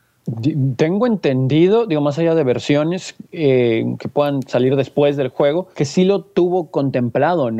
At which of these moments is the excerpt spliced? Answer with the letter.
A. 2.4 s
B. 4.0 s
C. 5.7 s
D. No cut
C